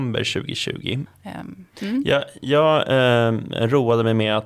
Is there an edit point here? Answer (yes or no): yes